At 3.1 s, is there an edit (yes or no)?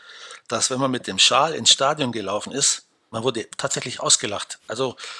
yes